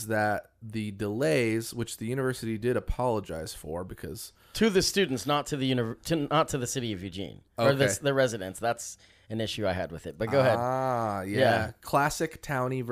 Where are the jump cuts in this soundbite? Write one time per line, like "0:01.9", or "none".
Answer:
none